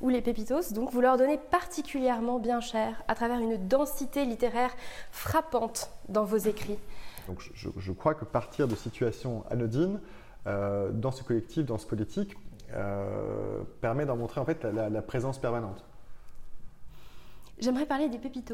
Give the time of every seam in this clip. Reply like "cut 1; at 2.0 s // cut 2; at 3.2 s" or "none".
cut 1; at 7.3 s